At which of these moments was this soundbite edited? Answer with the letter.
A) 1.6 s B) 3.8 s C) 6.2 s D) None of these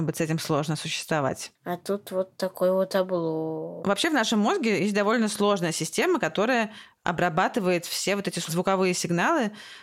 A